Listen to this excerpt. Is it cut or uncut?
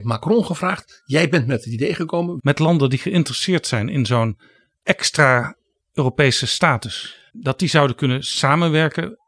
cut